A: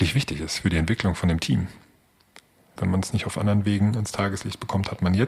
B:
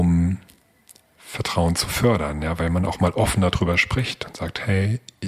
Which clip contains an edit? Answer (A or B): A